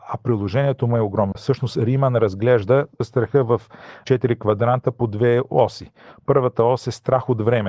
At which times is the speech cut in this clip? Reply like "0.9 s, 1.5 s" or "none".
1.3 s